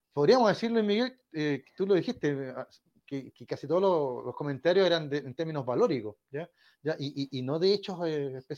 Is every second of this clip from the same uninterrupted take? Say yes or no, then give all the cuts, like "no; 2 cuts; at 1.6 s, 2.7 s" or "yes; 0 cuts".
yes; 0 cuts